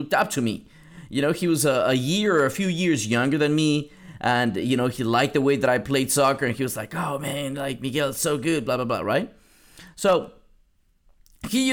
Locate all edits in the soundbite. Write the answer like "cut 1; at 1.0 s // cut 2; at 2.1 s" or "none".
none